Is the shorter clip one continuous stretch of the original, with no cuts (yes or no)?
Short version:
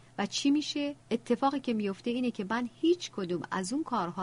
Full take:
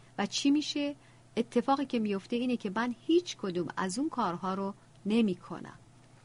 no